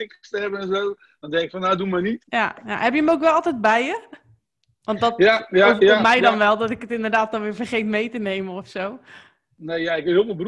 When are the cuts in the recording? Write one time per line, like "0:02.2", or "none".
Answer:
0:02.2